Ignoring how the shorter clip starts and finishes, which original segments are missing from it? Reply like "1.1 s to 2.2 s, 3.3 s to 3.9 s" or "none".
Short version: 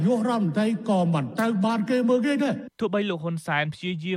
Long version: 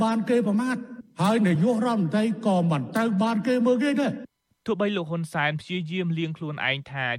4.3 s to 4.6 s